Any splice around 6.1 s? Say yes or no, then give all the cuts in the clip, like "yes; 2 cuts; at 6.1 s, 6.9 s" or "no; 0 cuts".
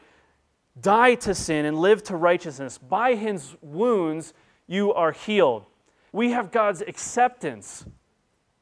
yes; 1 cut; at 6.1 s